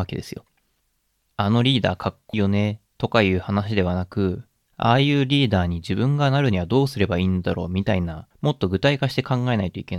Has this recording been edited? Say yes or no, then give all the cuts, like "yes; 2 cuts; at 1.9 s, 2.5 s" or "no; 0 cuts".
yes; 2 cuts; at 2.3 s, 8.3 s